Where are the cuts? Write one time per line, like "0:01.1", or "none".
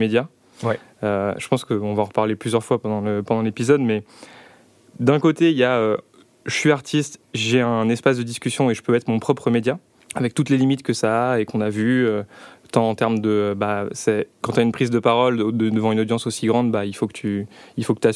0:10.0